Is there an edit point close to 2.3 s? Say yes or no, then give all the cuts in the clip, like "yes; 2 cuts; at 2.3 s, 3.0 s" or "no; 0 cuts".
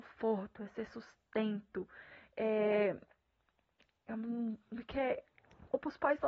no; 0 cuts